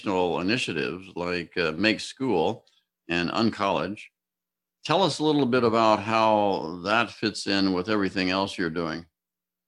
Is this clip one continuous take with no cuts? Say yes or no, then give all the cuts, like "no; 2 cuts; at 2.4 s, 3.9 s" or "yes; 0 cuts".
yes; 0 cuts